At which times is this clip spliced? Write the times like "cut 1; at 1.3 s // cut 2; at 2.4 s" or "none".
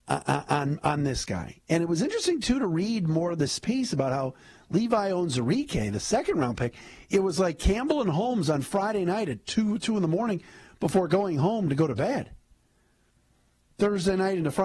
none